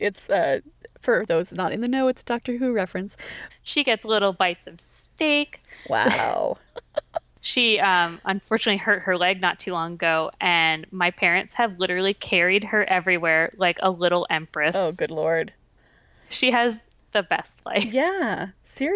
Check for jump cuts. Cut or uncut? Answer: cut